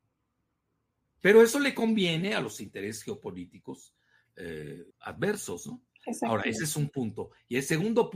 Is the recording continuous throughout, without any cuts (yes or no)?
no